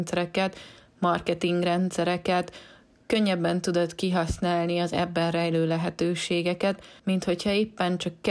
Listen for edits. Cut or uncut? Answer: uncut